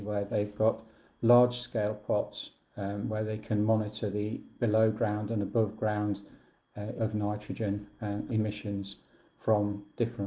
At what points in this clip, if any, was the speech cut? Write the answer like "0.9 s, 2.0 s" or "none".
7.0 s, 8.3 s